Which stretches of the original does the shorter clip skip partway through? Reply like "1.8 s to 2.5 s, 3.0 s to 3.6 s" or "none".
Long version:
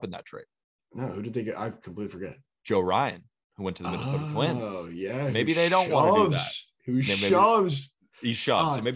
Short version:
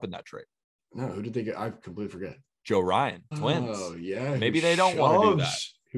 3.3 s to 4.2 s